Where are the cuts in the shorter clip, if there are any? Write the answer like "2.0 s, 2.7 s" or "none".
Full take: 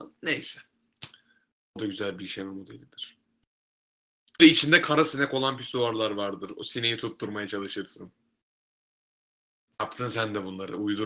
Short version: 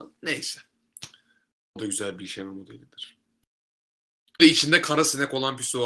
none